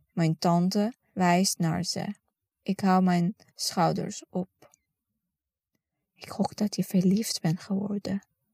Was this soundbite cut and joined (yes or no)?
yes